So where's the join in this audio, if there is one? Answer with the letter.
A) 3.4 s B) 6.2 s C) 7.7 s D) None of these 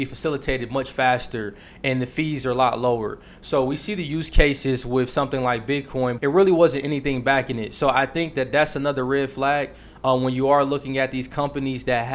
B